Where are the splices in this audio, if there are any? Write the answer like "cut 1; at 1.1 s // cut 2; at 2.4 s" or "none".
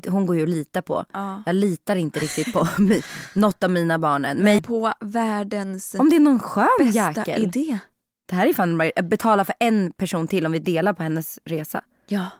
cut 1; at 4.6 s